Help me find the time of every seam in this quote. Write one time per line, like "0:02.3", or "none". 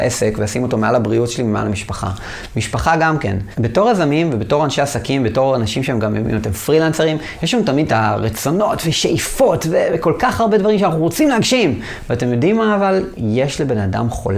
0:03.5